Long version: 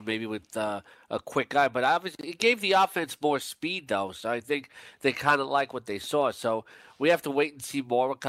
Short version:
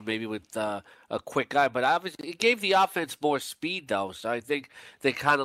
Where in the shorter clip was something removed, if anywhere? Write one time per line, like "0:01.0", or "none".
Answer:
none